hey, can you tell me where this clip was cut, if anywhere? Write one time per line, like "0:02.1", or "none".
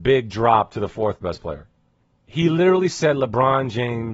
0:02.1